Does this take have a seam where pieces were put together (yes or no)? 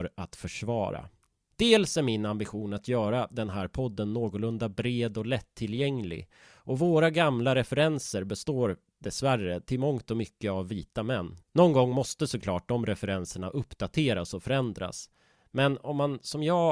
yes